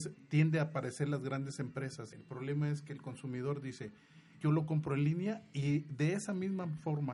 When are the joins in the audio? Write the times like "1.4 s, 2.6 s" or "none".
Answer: 2.1 s, 4.4 s